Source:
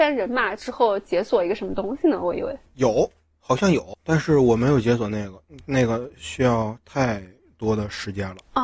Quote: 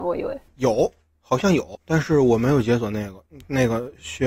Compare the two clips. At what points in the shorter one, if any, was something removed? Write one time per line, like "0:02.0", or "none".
none